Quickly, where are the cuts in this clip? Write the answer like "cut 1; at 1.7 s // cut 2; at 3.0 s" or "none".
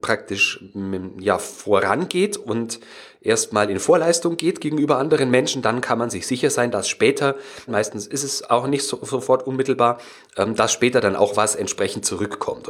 cut 1; at 7.7 s